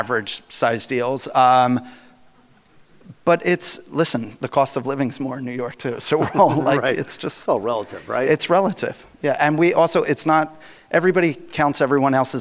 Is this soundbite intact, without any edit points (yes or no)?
yes